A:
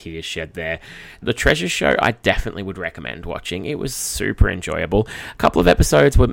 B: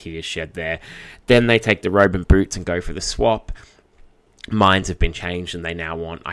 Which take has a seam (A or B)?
A